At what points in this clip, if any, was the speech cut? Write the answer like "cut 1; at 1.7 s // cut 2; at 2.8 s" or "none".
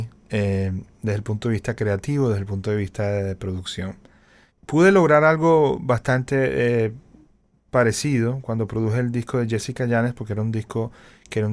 none

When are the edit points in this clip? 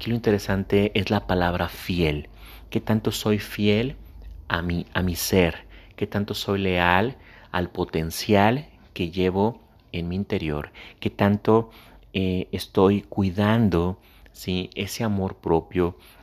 none

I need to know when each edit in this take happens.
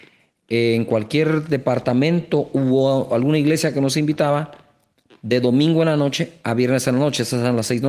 none

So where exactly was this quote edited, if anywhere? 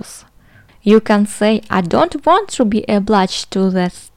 none

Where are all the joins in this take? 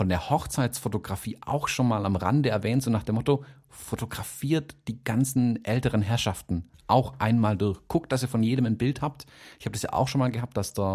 none

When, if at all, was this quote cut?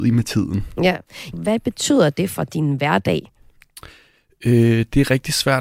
cut 1; at 1.3 s

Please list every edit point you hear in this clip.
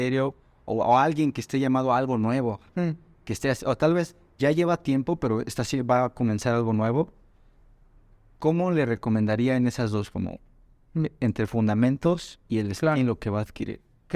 none

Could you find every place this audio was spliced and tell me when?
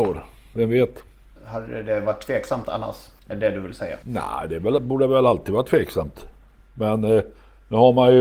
none

